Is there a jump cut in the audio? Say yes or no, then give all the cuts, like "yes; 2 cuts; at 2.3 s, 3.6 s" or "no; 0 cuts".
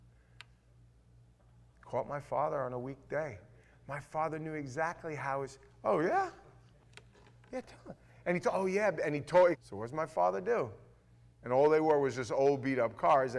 yes; 2 cuts; at 9.5 s, 11.3 s